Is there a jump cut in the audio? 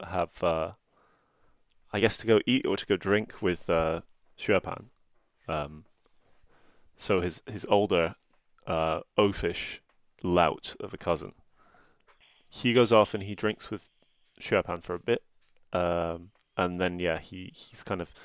no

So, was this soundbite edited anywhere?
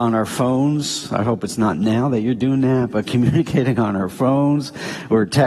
no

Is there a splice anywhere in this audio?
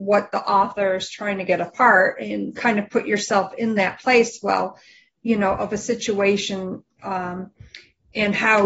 yes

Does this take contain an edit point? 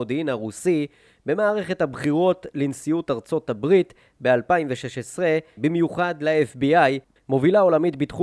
yes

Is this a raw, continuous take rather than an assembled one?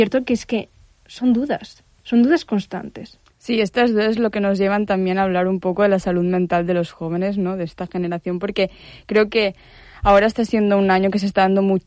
yes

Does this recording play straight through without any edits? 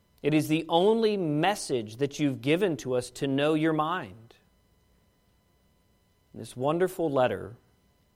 yes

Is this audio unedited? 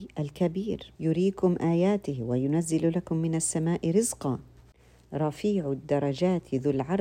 no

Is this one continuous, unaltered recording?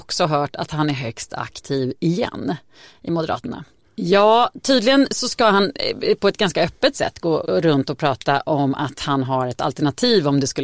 no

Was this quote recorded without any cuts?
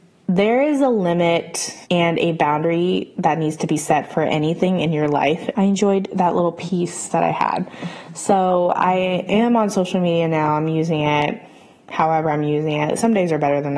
no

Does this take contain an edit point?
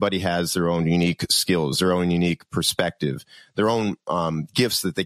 no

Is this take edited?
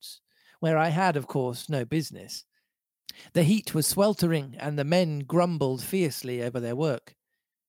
no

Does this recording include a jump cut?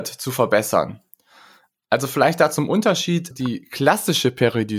yes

